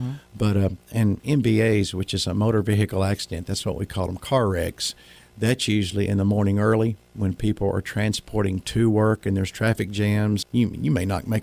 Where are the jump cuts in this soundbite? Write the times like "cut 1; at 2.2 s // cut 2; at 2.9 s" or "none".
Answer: cut 1; at 10.4 s

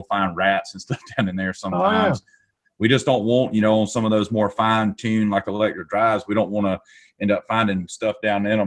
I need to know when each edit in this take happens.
none

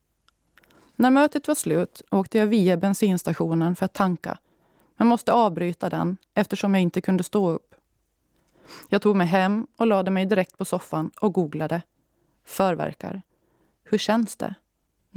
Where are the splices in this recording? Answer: cut 1; at 2.1 s

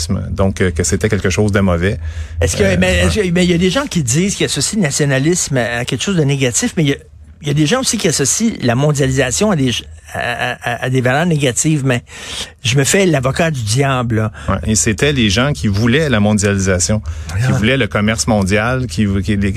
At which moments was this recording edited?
cut 1; at 14.6 s

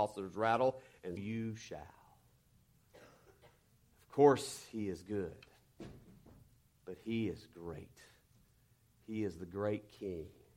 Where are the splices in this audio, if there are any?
cut 1; at 1.2 s

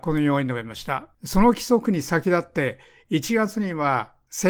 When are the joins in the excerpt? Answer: cut 1; at 1.1 s

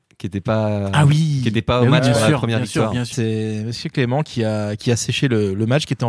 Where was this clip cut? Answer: cut 1; at 3.1 s

